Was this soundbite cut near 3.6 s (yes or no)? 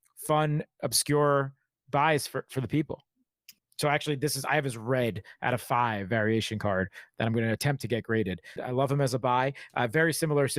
yes